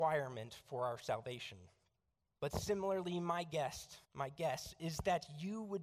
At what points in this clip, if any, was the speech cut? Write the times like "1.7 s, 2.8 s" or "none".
2.4 s, 4.0 s